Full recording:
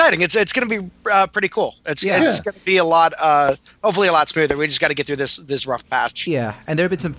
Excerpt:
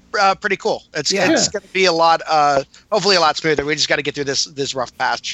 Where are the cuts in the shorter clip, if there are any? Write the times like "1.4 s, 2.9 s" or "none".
none